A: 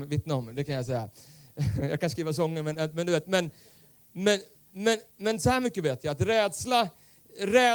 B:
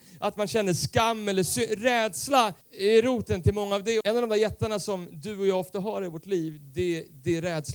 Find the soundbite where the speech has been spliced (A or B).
B